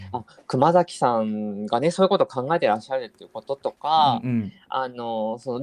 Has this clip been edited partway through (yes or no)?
no